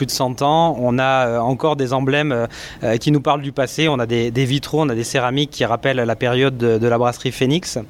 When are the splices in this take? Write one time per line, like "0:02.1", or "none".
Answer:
none